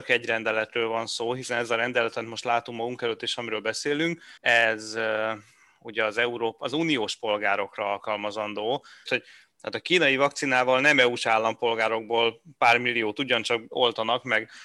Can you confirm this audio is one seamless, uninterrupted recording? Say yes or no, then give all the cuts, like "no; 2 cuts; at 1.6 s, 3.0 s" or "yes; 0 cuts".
no; 2 cuts; at 4.4 s, 9.1 s